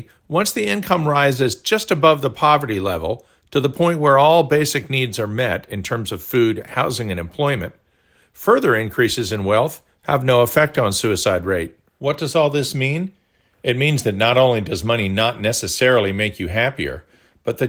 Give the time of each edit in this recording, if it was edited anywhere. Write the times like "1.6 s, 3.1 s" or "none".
11.9 s

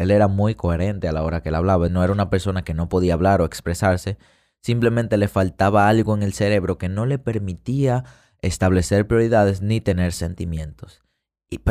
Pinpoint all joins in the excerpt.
1.9 s

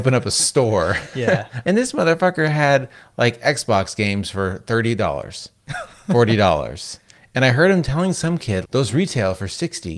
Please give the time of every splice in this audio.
1.6 s, 8.6 s

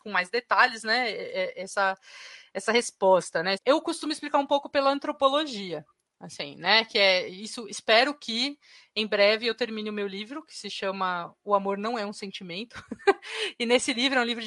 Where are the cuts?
3.5 s

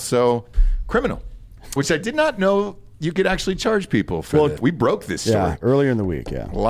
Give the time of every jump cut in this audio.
1.8 s, 4.6 s

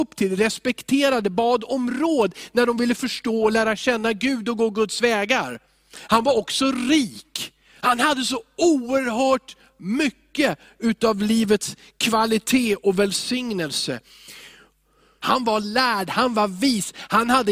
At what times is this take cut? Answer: 15.2 s

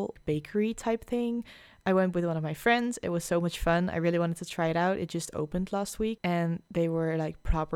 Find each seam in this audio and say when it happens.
6.2 s

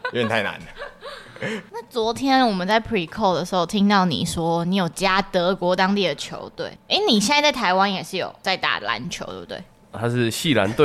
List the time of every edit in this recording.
none

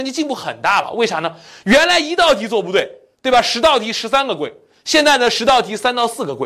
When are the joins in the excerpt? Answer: none

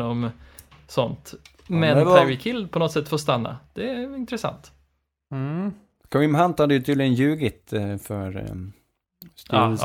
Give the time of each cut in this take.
none

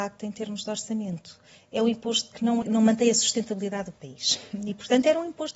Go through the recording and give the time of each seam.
2.6 s

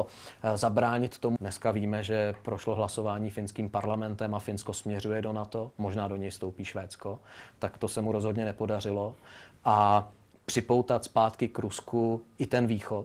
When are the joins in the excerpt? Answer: 1.4 s

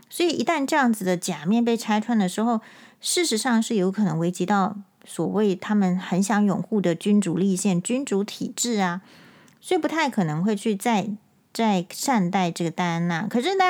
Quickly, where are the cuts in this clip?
none

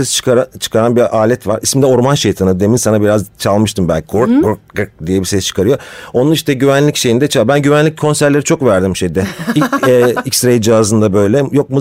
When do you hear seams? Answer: none

